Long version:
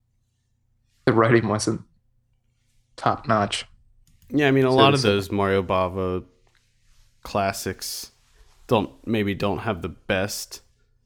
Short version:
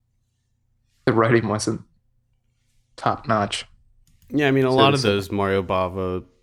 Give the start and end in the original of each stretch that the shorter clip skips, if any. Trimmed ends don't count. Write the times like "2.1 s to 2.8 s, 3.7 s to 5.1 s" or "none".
none